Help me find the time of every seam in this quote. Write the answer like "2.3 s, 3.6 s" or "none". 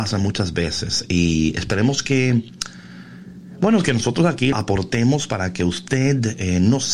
4.5 s